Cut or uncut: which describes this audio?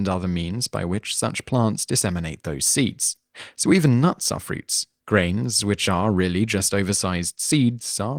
uncut